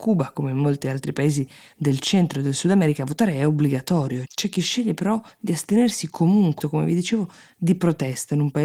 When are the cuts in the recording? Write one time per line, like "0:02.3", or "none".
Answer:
0:04.3
0:06.6